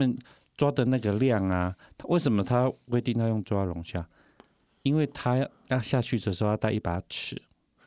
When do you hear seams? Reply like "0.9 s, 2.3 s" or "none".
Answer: none